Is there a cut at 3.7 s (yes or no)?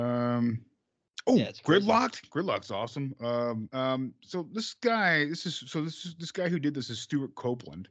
yes